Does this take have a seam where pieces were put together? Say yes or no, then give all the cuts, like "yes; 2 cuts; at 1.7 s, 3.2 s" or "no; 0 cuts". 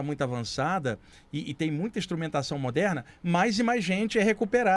no; 0 cuts